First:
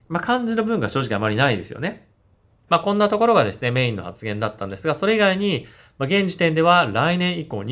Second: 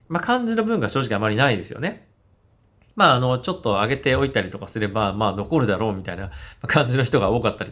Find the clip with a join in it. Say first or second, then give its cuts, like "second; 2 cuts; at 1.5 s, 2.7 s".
first; 1 cut; at 2.7 s